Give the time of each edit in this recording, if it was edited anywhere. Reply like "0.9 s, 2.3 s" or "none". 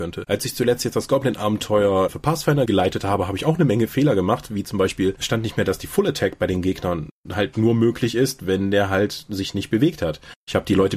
none